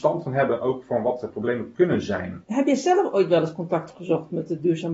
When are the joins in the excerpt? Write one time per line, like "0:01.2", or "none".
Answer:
0:02.4